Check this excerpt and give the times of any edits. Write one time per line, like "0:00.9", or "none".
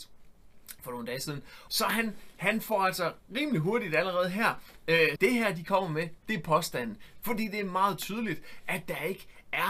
0:01.7
0:05.2
0:07.2